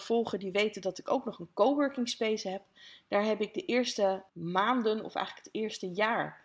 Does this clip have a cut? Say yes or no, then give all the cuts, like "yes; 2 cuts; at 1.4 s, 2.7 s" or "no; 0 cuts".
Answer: yes; 1 cut; at 4.3 s